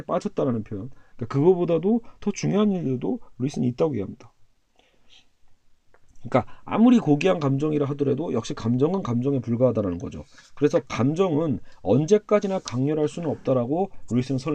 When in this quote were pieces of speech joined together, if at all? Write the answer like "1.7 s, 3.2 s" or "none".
1.1 s